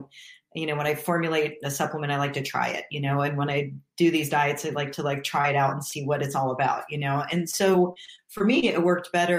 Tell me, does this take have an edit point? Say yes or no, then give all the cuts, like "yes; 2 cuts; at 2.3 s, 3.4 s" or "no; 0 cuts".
no; 0 cuts